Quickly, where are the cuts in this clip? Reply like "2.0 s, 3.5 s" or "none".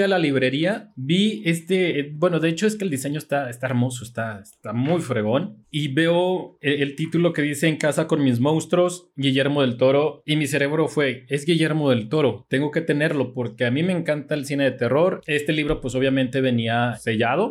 none